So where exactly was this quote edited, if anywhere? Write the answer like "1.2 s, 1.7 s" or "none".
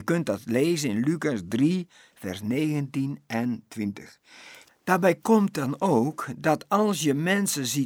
4.7 s